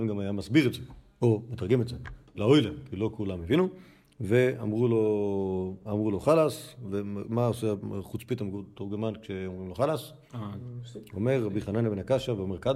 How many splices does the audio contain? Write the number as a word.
zero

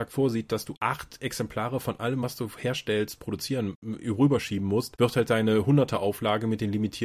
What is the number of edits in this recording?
zero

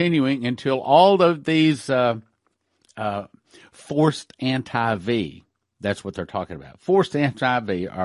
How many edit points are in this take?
zero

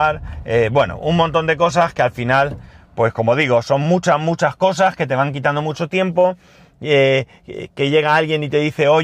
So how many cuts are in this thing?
zero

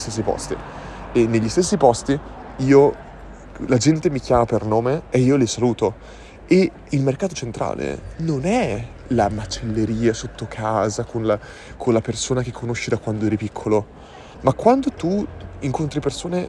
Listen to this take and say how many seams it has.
one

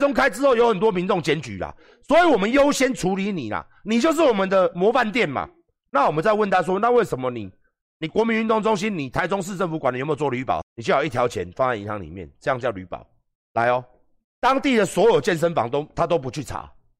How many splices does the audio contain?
two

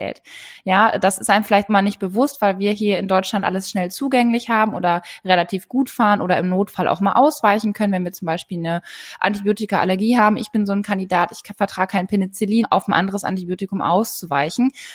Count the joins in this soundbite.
two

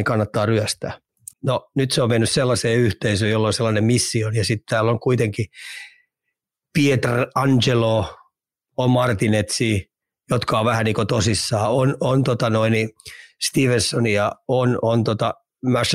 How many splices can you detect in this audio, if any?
one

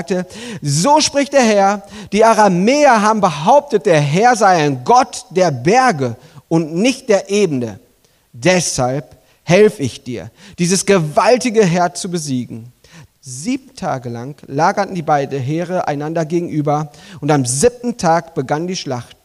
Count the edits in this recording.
one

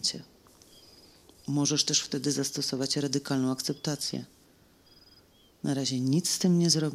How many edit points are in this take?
zero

